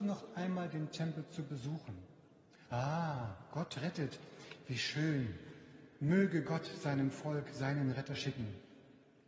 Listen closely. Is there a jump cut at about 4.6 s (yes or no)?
no